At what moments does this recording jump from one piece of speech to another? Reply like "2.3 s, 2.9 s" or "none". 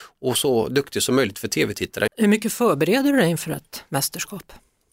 2.1 s